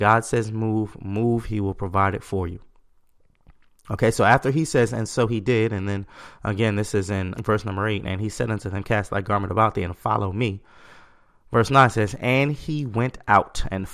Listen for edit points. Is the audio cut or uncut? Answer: cut